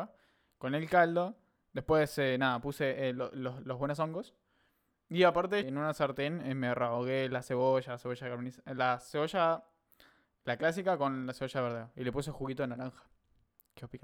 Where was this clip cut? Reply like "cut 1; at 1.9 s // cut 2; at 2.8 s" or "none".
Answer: cut 1; at 5.6 s